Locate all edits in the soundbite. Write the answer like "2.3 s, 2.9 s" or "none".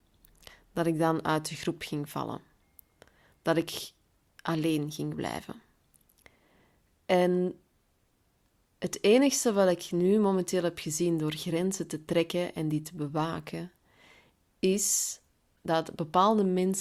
none